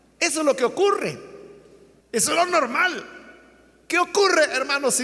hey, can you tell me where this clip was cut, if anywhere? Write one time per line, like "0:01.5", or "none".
0:02.0